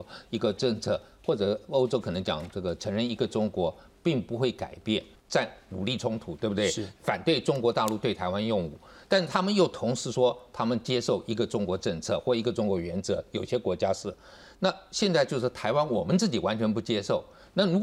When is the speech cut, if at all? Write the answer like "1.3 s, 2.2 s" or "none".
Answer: 5.1 s, 7.0 s